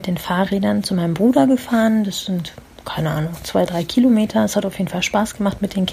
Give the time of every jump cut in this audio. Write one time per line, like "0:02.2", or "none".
none